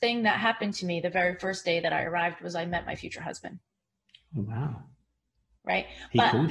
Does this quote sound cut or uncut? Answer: uncut